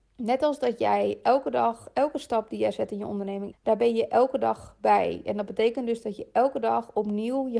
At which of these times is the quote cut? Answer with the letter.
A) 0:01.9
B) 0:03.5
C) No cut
B